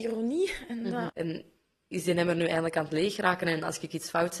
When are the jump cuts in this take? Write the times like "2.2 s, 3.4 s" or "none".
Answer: 1.1 s